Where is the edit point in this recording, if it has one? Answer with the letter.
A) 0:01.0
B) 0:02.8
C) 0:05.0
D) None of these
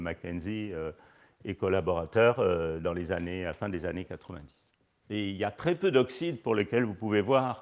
C